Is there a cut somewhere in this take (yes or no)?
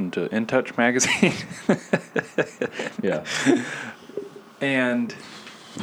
no